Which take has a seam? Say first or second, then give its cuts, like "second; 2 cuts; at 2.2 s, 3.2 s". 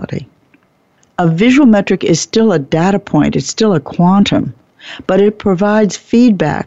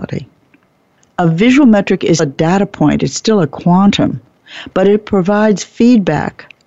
second; 1 cut; at 2.2 s